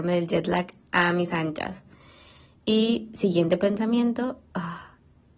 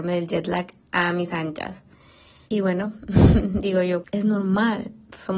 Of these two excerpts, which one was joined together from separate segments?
second; 2 cuts; at 2.5 s, 4.0 s

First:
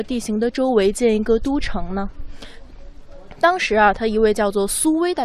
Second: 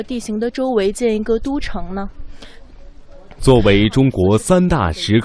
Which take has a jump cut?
second; 1 cut; at 3.4 s

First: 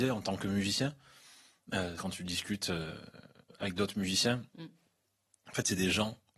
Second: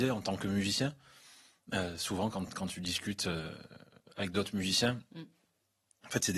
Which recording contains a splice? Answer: first; 1 cut; at 2.0 s

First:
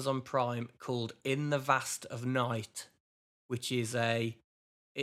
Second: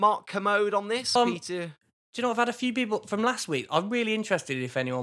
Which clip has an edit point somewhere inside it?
second; 1 cut; at 1.2 s

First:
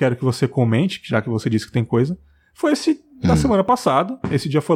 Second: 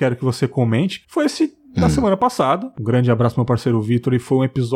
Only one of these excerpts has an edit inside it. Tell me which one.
second; 2 cuts; at 1.0 s, 2.7 s

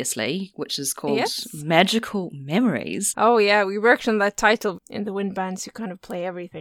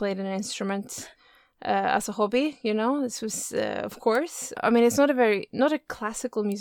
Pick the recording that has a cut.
first; 1 cut; at 4.7 s

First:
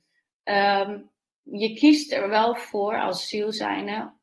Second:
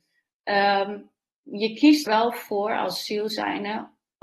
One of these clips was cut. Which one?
second; 1 cut; at 2.1 s

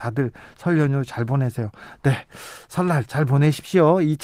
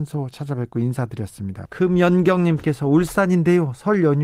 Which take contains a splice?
second; 1 cut; at 1.7 s

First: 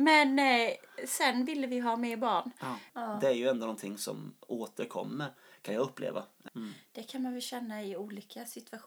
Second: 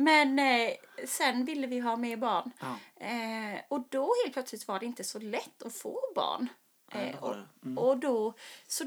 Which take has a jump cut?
first; 2 cuts; at 2.9 s, 6.5 s

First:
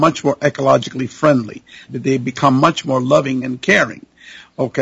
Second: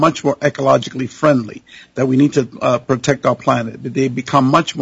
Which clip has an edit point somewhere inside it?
first; 1 cut; at 1.9 s

